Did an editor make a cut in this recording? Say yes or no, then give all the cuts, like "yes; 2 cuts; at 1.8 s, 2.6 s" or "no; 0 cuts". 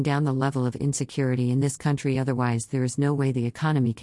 no; 0 cuts